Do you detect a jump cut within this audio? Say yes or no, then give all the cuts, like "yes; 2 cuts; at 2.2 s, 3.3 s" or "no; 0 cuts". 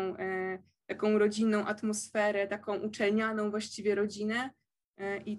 no; 0 cuts